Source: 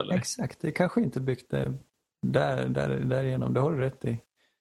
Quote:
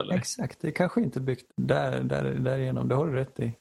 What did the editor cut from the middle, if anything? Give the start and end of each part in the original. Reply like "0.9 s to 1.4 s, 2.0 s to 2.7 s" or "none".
1.5 s to 2.1 s